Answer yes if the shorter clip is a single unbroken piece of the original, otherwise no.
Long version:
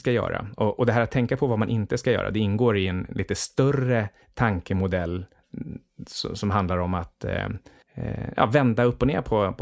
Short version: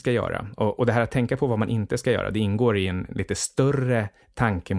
yes